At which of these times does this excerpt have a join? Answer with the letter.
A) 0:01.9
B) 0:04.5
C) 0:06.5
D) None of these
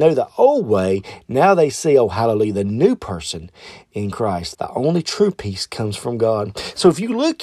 B